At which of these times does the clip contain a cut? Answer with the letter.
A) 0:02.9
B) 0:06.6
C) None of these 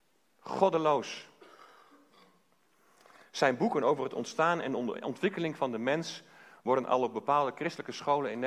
C